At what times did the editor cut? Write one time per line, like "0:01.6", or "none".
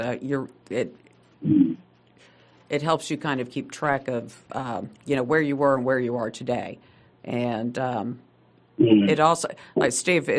none